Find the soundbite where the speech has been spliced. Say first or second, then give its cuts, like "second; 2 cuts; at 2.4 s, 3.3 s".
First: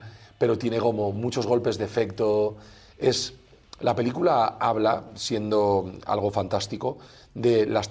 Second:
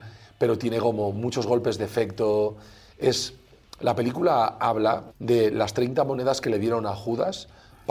second; 1 cut; at 5.1 s